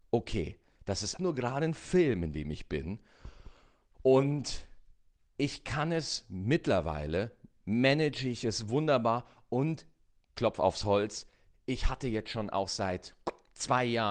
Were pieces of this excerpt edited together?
yes; 1 cut; at 1.2 s

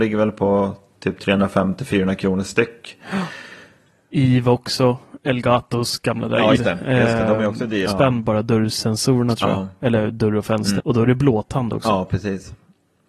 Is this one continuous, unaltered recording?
no; 3 cuts; at 6.6 s, 7.9 s, 10.8 s

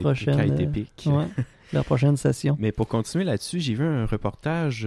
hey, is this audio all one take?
yes; 0 cuts

